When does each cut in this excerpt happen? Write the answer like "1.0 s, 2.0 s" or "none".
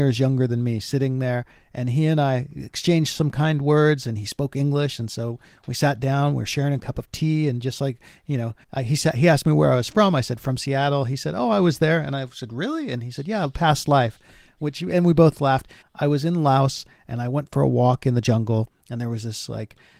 8.6 s, 15.8 s